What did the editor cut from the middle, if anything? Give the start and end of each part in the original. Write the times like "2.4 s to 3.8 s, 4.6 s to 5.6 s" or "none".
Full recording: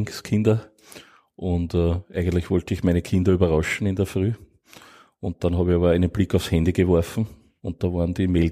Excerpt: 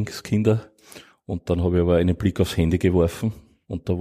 1.1 s to 5.0 s